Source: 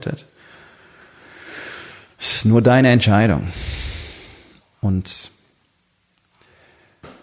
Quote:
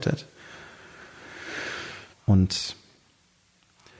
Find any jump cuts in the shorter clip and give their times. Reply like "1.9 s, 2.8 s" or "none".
2.1 s